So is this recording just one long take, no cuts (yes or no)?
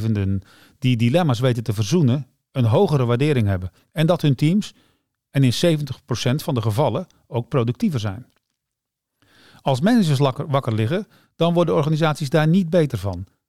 yes